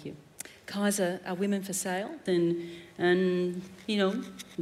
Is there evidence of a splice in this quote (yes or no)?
yes